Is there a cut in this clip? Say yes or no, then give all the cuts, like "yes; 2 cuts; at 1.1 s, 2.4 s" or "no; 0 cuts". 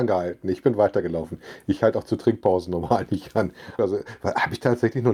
yes; 1 cut; at 3.8 s